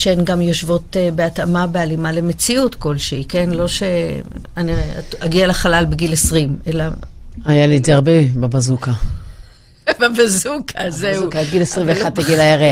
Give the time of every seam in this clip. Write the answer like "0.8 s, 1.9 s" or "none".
none